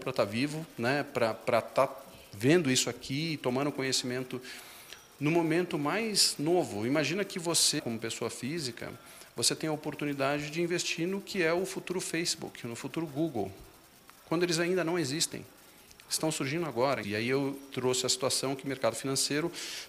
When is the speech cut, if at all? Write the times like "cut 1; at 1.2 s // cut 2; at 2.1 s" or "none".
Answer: cut 1; at 7.8 s // cut 2; at 17.0 s

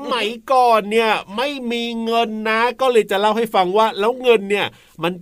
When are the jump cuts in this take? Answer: none

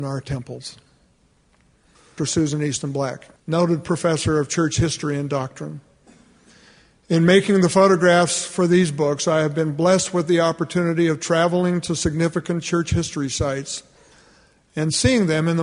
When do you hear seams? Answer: cut 1; at 2.2 s // cut 2; at 3.4 s

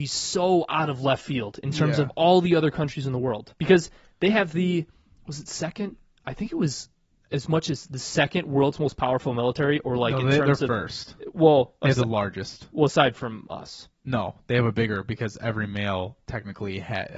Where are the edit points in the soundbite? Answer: cut 1; at 3.6 s

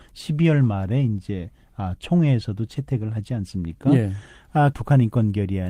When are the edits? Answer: cut 1; at 4.7 s

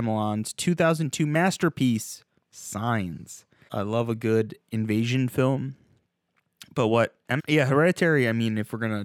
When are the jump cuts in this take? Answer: cut 1; at 3.7 s // cut 2; at 7.4 s

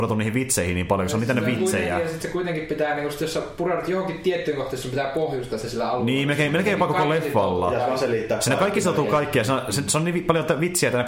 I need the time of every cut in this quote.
none

